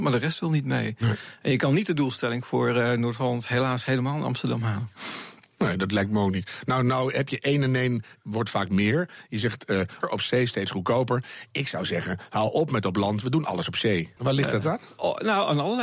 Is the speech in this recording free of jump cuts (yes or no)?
no